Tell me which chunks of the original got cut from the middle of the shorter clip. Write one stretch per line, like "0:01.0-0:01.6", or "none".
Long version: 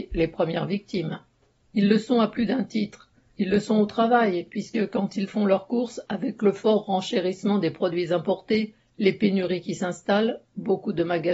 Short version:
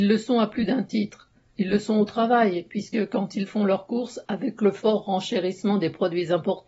none